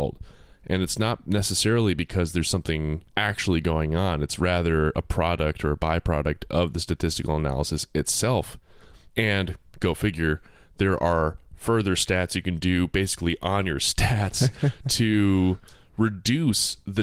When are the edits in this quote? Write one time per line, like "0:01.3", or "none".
0:09.1